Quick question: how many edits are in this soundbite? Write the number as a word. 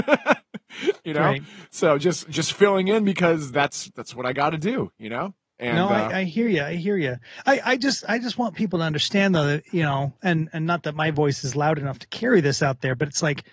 zero